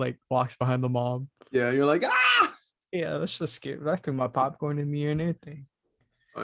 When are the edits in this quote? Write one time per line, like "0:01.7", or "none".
none